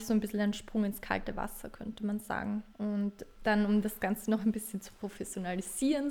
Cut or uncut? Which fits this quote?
cut